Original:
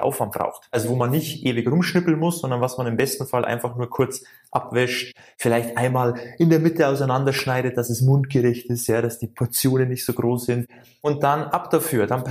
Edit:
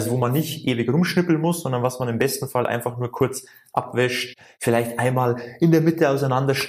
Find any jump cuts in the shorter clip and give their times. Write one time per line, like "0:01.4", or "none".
none